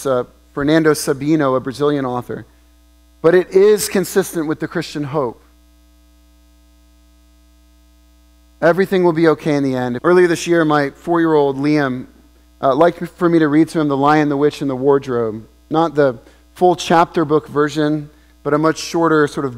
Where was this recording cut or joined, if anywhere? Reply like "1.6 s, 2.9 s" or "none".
10.0 s